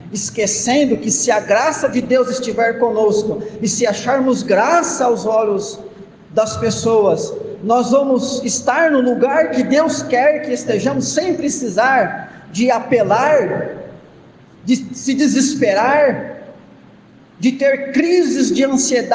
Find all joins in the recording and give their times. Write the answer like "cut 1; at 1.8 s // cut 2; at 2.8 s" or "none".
none